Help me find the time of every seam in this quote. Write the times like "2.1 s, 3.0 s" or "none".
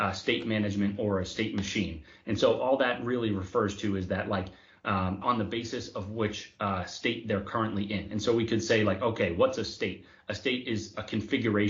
5.2 s